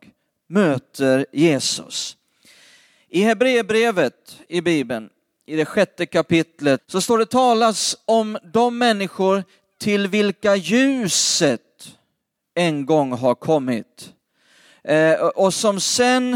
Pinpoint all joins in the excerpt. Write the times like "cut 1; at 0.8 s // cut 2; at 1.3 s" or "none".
cut 1; at 6.8 s